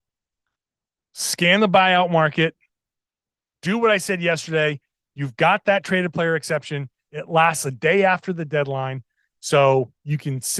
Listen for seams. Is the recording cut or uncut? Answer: uncut